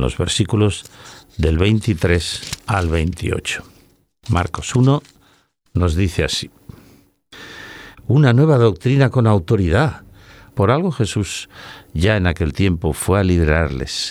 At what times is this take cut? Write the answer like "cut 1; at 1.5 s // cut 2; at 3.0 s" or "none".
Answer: cut 1; at 7.9 s // cut 2; at 10.5 s